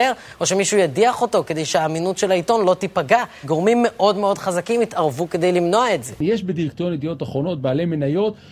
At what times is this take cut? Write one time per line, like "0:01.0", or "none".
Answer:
0:03.4

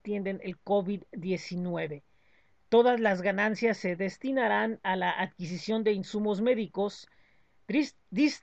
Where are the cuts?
none

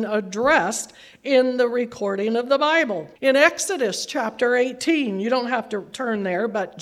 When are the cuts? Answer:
0:03.2

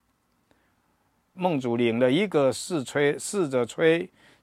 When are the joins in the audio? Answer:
0:01.3

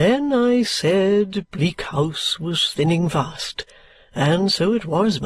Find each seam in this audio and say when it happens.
none

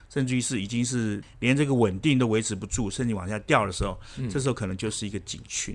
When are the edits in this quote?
0:01.2

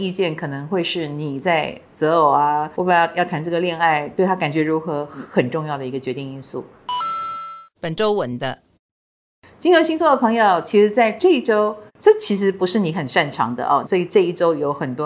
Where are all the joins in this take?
0:11.9
0:13.8

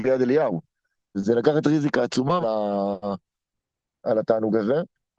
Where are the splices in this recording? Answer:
0:01.1
0:02.4

